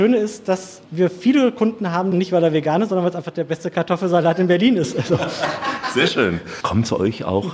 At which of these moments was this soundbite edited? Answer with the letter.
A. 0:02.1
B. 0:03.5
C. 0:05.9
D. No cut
A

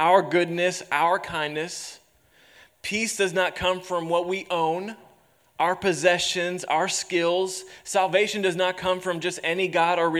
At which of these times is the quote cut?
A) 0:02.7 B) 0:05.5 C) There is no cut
C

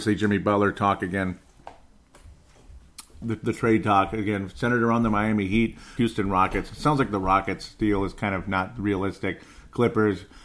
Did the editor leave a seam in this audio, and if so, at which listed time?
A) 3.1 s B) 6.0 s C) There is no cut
B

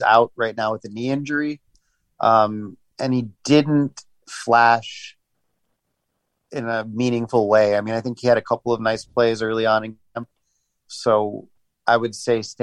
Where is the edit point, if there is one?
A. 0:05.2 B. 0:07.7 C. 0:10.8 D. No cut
C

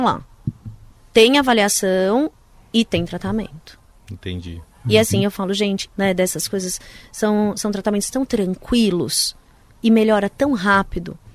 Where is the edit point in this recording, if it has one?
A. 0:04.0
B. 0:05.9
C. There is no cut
B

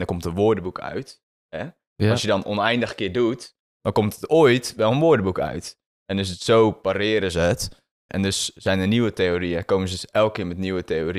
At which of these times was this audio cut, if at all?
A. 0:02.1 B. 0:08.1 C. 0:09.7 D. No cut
B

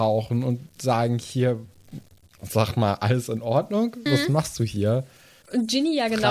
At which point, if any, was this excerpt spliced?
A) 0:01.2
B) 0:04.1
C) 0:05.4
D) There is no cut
B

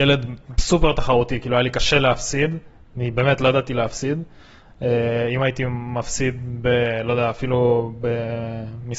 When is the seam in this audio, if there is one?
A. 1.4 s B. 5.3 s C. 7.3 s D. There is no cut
D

